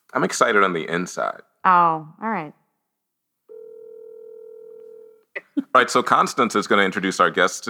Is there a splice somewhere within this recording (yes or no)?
no